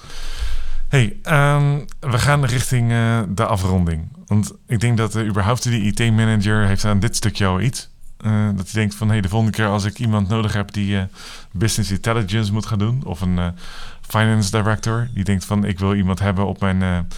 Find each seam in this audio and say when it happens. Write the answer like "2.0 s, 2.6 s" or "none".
none